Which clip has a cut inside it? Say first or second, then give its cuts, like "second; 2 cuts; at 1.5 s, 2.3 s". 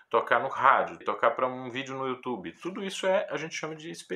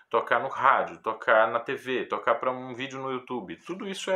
first; 1 cut; at 1.0 s